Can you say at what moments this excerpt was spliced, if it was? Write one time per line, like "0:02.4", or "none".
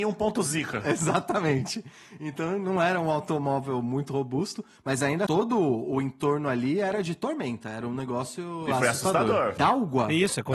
0:05.3
0:09.6